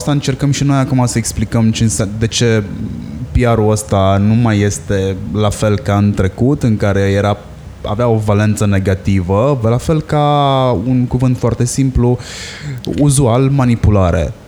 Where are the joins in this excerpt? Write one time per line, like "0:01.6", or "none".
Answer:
0:09.6